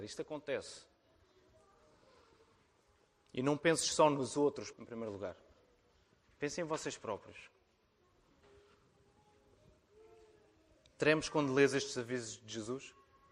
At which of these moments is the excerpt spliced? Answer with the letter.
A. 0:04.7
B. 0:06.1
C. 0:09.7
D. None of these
A